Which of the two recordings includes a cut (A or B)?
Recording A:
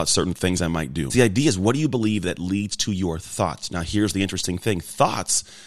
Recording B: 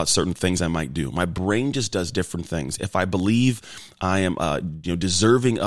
A